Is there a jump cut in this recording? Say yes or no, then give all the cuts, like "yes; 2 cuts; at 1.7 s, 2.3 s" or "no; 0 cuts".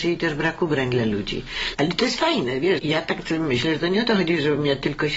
yes; 2 cuts; at 1.7 s, 2.8 s